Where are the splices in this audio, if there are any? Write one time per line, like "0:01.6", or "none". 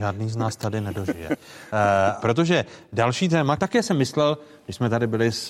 0:02.2
0:03.6